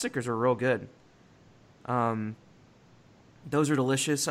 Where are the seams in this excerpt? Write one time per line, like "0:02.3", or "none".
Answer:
none